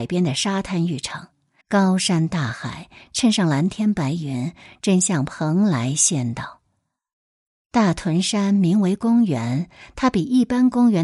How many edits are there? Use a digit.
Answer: 1